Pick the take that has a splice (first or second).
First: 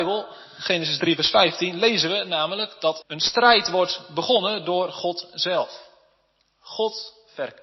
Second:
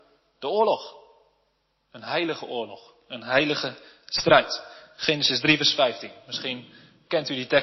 first